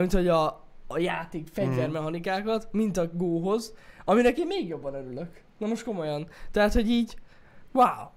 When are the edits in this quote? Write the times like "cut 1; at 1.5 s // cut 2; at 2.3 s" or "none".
none